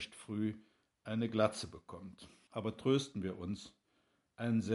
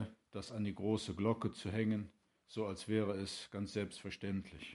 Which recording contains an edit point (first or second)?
first